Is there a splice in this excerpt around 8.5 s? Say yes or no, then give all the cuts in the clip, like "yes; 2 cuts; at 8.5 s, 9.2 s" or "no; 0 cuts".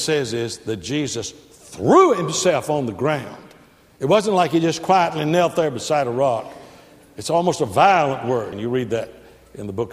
yes; 1 cut; at 8.5 s